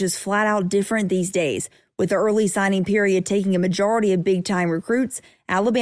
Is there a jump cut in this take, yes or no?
no